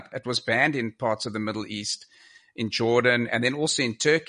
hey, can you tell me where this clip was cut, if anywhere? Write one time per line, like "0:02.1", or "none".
none